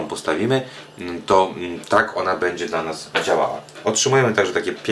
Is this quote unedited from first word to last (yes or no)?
yes